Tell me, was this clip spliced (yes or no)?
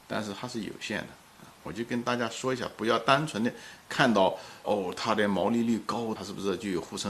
yes